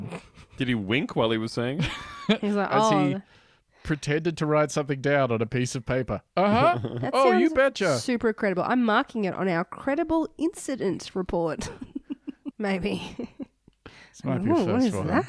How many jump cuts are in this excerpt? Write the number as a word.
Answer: one